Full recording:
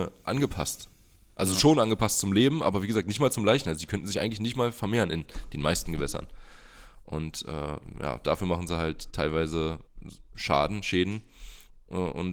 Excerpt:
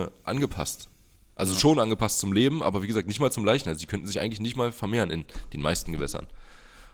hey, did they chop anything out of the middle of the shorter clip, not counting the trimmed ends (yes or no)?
no